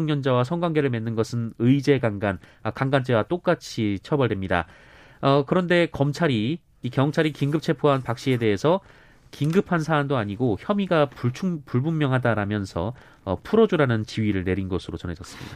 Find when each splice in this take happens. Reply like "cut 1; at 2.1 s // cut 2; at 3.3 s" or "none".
none